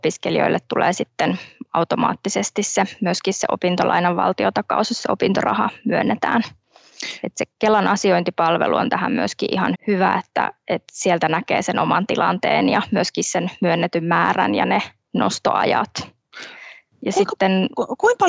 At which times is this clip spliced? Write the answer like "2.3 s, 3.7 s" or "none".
9.7 s